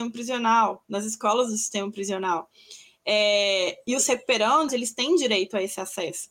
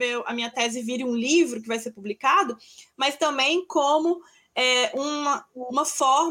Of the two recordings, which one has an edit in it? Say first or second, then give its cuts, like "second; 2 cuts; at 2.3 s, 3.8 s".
first; 1 cut; at 4.7 s